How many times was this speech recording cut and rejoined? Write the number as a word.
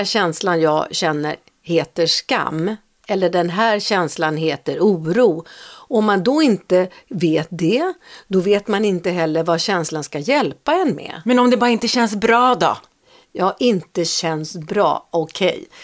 zero